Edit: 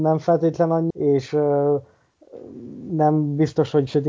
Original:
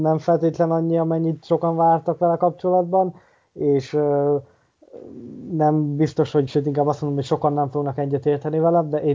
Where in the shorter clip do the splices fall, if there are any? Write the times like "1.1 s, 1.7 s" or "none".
0.9 s